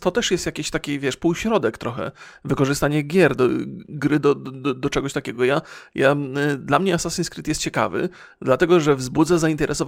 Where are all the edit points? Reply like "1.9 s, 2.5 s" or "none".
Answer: none